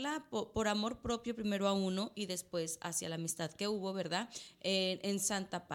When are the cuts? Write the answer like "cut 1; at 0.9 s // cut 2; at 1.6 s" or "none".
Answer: none